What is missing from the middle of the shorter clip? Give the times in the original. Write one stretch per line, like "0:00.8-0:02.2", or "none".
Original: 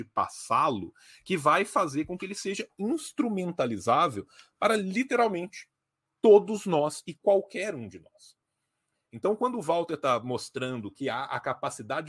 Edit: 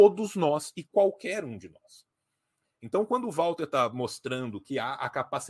none